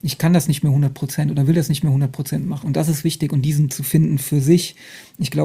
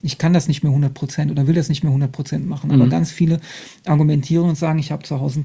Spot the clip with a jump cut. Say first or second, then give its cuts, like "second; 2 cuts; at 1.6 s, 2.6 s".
first; 2 cuts; at 2.6 s, 3.7 s